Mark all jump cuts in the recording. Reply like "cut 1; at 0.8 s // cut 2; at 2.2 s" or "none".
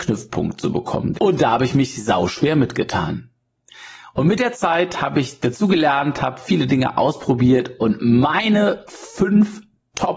cut 1; at 1.1 s